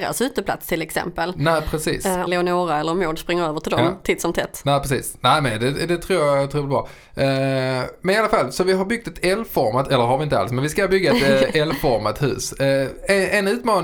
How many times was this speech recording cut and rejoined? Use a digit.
1